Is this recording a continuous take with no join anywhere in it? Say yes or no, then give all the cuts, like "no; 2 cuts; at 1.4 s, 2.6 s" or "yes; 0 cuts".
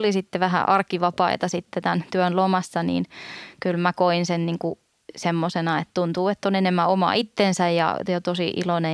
yes; 0 cuts